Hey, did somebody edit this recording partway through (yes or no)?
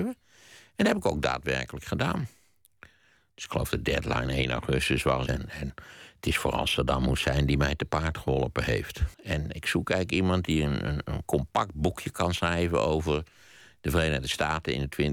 yes